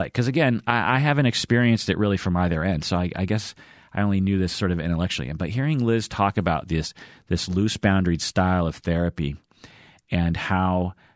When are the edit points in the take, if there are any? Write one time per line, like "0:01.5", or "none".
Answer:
none